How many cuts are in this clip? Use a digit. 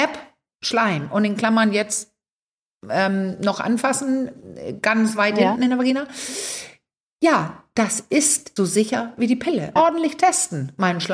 2